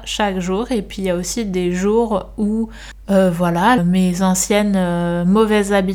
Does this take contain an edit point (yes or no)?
yes